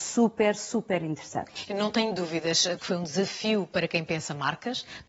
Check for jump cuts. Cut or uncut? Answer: cut